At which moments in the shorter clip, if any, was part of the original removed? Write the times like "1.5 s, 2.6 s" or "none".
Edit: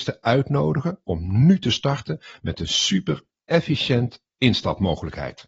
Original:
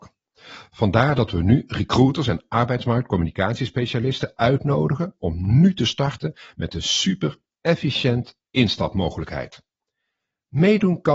none